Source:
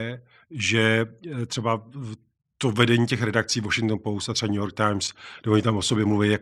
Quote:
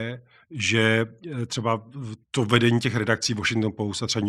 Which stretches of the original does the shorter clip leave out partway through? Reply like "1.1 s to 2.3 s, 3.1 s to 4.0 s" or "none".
2.2 s to 2.5 s